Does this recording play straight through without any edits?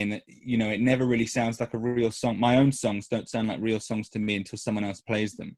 yes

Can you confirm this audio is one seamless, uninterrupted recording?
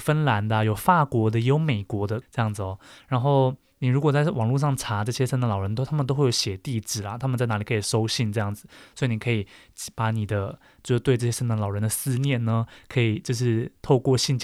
no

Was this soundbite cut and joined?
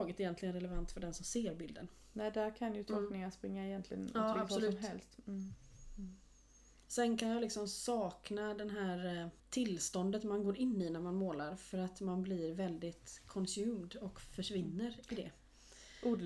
yes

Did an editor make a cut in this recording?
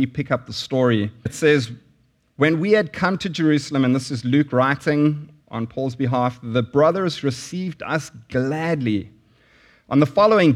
yes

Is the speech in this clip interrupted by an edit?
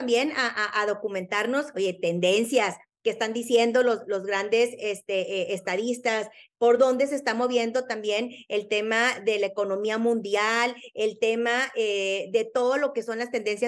no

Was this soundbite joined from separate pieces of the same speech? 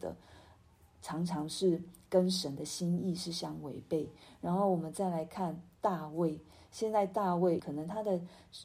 yes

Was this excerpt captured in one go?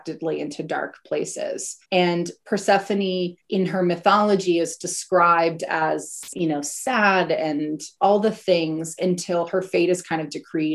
no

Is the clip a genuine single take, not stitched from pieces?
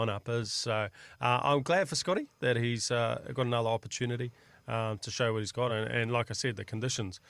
yes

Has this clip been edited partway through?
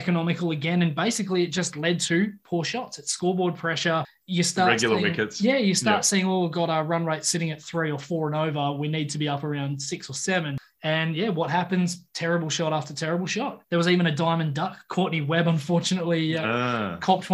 yes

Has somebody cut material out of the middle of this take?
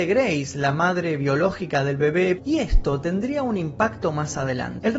yes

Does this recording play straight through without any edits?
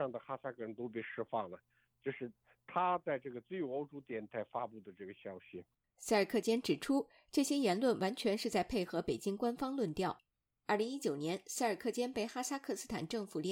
yes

